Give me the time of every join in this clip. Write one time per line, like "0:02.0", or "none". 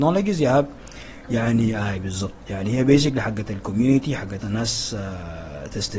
0:04.4